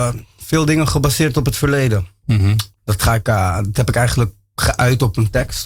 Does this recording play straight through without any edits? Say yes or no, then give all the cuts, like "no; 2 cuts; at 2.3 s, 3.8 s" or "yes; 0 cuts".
no; 1 cut; at 2.7 s